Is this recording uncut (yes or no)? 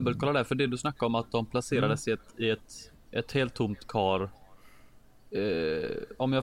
yes